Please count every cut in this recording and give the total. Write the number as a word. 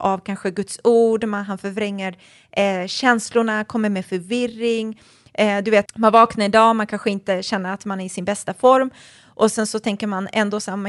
one